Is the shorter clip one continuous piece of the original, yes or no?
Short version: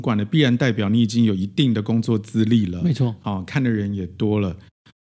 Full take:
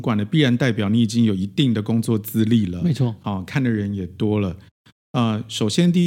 yes